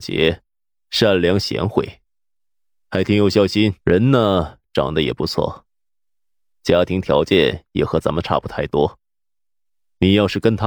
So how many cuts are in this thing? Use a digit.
1